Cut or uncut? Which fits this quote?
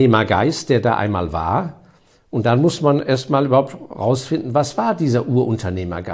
uncut